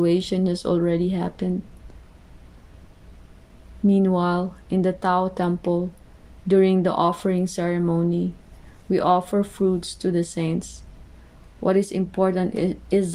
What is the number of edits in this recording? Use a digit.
1